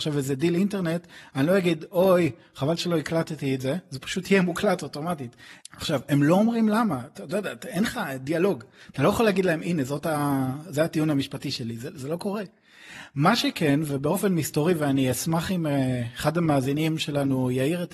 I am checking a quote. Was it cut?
yes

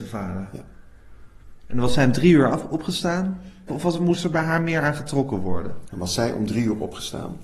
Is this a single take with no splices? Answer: no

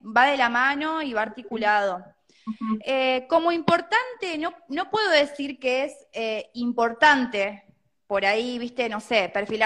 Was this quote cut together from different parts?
no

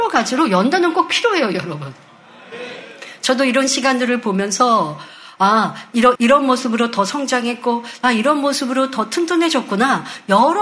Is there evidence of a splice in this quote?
yes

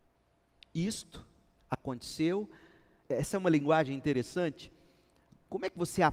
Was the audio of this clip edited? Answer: yes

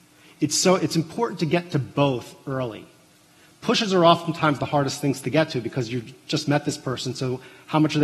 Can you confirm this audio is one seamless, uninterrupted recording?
yes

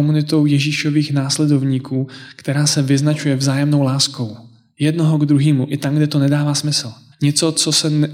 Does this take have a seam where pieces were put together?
yes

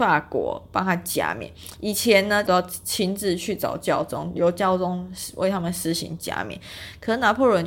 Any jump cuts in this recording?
yes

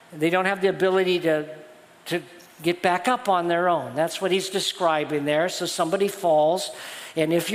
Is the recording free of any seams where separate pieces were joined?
yes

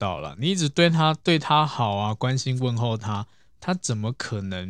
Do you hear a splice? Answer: no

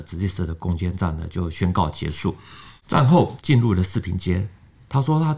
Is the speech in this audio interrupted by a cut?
yes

